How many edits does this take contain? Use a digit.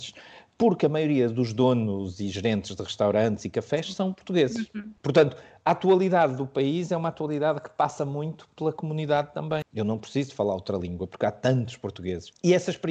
2